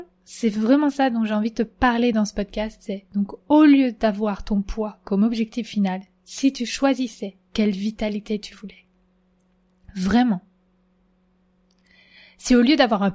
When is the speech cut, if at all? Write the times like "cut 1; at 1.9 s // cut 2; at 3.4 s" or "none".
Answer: none